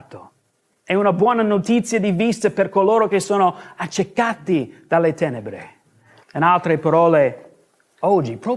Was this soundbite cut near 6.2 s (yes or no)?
yes